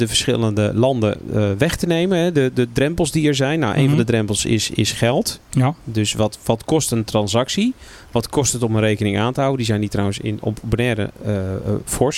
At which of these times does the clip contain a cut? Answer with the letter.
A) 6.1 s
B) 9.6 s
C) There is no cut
C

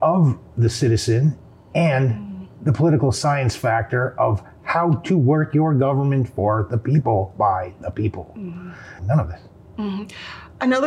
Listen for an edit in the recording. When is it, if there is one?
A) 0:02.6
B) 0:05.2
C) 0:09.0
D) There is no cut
C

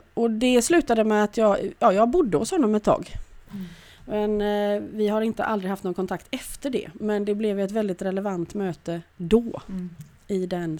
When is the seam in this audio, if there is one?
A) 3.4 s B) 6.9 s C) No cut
A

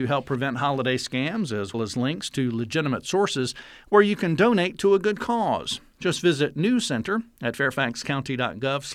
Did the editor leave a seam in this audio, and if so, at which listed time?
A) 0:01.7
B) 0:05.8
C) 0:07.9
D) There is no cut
A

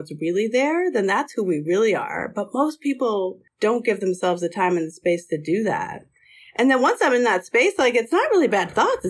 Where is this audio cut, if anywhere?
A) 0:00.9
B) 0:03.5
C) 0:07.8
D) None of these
B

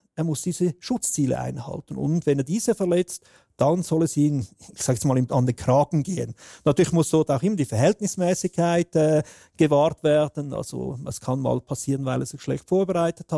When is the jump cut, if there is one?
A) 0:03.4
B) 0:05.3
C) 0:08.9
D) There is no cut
B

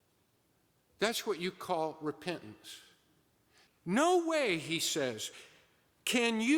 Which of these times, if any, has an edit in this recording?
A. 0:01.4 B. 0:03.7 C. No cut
B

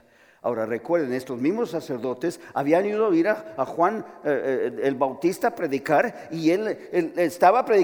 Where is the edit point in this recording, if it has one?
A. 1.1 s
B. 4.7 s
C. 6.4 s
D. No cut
D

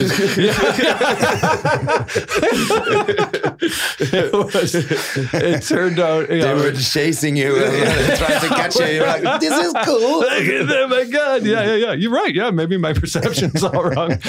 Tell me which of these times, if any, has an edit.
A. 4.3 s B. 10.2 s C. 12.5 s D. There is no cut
D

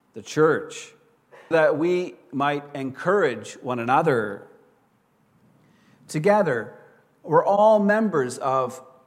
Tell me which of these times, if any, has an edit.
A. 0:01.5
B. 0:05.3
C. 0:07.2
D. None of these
A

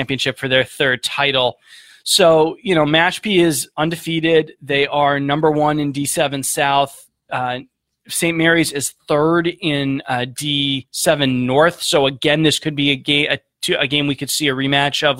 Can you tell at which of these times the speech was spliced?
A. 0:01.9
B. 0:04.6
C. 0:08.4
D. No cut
D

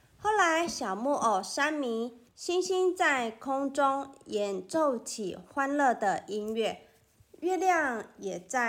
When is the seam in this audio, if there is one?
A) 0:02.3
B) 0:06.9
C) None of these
A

